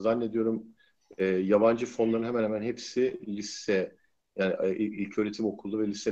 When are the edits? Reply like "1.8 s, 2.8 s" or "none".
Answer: none

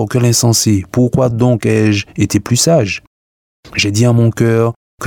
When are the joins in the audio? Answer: none

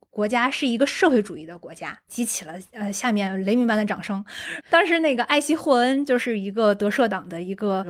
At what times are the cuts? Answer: 4.6 s

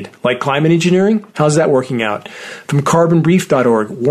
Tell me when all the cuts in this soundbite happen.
1.3 s

